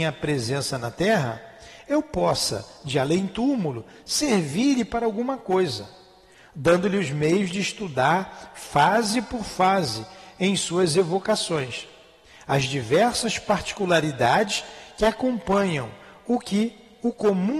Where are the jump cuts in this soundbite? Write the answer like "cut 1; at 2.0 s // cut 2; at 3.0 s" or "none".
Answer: none